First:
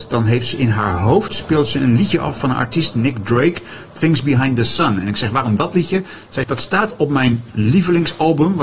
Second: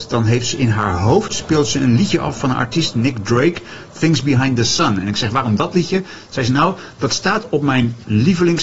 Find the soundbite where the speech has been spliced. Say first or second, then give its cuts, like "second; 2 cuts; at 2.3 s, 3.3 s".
first; 1 cut; at 6.4 s